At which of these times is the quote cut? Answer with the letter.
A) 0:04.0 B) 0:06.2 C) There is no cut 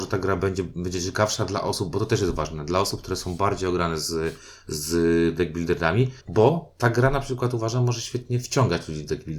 B